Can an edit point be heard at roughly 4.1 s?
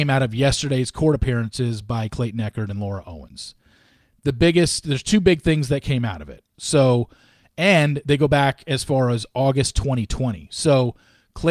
no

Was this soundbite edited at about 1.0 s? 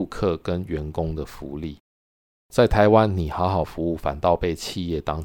no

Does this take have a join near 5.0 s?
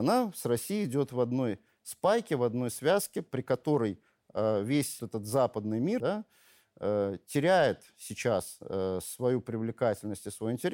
yes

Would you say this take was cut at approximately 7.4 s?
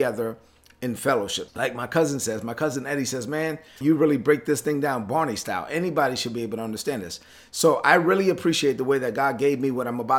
no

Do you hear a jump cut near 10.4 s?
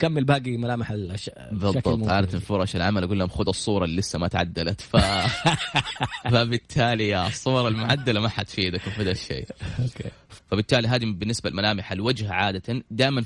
yes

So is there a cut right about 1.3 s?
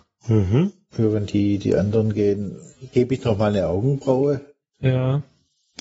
no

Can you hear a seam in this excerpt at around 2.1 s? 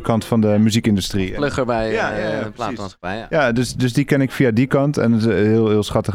no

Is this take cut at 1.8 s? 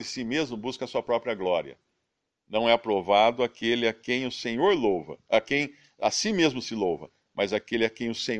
no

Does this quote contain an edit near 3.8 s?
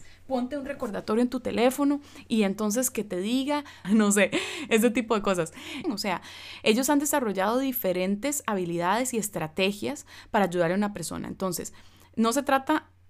yes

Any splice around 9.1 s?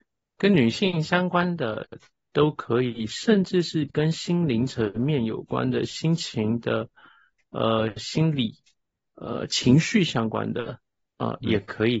yes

